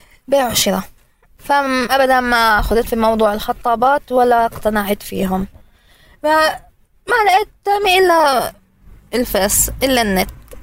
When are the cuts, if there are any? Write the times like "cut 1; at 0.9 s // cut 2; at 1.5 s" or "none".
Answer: none